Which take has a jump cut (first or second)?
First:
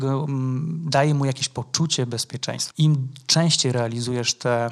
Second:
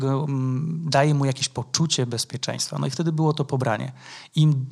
first